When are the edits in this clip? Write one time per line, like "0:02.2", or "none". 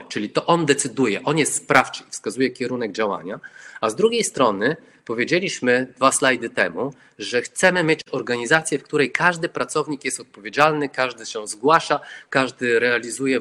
none